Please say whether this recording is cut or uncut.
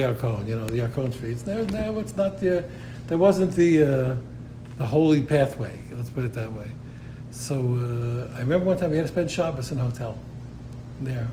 uncut